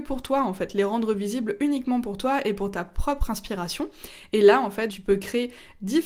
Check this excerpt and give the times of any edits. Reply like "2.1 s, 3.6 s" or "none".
4.9 s

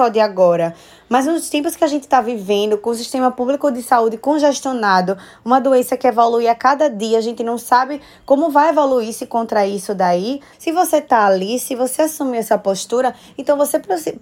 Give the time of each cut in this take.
10.5 s

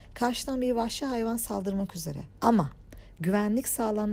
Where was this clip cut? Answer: 2.4 s

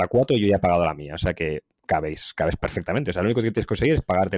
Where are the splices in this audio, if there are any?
none

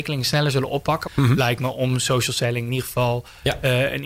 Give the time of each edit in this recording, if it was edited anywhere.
1.0 s

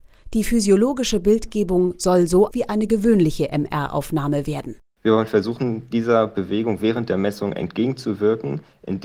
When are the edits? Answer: 2.5 s, 4.9 s

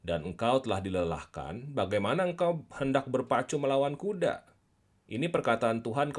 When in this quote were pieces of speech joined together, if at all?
5.1 s

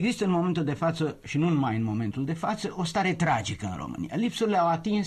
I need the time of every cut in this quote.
none

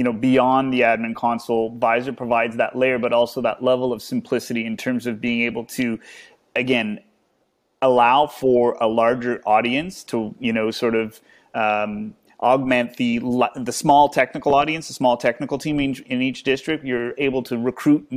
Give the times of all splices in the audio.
none

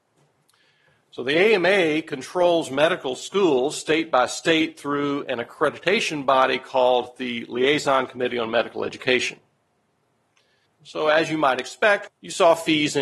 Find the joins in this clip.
10.7 s, 12.1 s

